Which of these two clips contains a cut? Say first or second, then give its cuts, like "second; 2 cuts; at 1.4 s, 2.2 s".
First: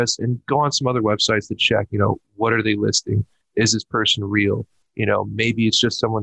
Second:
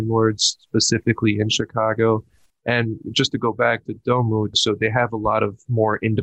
second; 1 cut; at 4.5 s